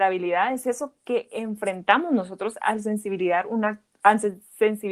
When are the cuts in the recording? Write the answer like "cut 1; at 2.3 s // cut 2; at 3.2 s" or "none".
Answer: none